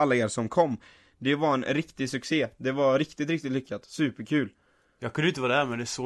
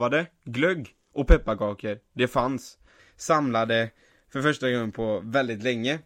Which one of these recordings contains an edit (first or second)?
second